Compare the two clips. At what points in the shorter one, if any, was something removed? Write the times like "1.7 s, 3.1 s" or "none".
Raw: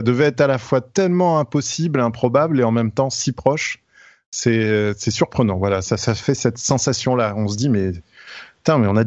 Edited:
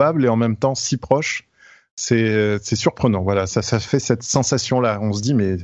none